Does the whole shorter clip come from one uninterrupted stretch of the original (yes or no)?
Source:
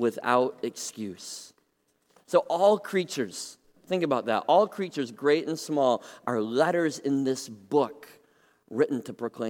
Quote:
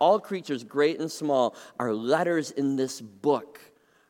yes